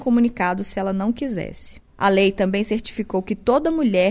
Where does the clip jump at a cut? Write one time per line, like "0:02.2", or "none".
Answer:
0:01.9